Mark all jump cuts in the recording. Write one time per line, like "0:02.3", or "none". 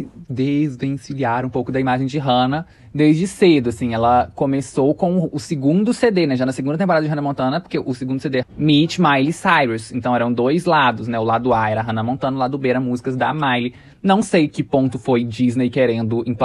0:08.4